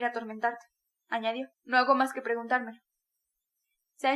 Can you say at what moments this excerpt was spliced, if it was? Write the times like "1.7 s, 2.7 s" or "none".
1.5 s